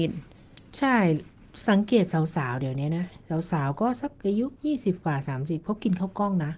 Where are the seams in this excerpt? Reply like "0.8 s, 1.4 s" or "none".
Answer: 4.6 s